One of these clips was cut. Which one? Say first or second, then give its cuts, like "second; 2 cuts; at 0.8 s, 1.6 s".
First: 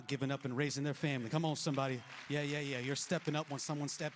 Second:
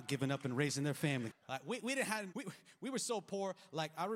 second; 2 cuts; at 1.3 s, 2.3 s